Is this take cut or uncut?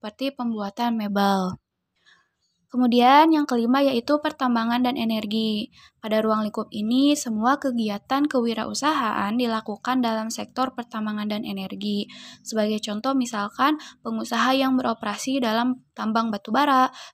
uncut